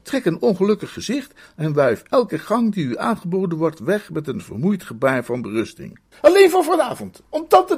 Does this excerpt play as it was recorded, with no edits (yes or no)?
no